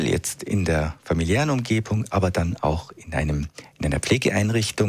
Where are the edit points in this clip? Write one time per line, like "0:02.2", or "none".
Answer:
none

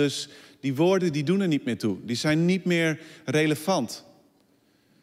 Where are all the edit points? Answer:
none

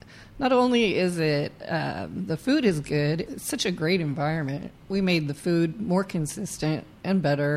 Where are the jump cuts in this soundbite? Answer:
0:03.3
0:04.7

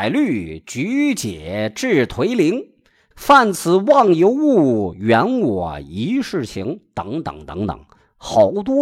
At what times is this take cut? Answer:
0:03.1

